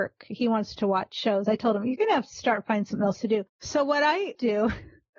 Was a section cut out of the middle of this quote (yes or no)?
no